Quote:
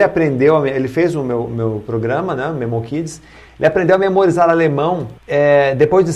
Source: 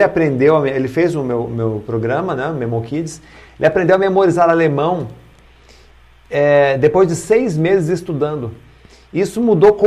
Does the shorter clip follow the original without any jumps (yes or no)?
no